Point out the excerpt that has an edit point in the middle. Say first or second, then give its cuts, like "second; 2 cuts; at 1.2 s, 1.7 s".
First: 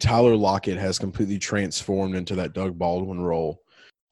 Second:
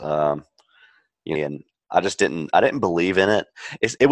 second; 1 cut; at 1.3 s